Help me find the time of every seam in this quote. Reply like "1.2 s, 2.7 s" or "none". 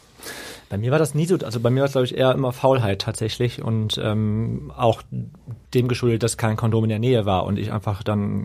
5.7 s